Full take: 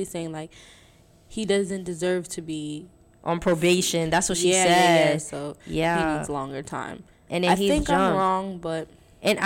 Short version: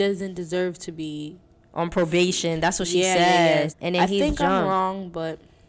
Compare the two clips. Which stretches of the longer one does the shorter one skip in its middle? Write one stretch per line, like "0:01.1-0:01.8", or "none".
0:05.2-0:07.2